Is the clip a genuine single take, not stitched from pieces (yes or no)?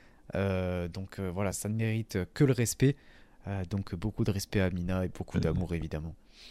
no